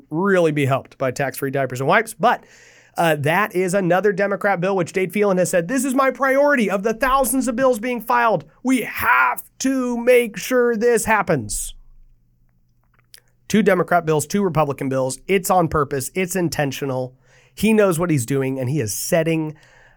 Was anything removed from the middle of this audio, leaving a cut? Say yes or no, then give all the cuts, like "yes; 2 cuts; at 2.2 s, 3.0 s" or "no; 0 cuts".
no; 0 cuts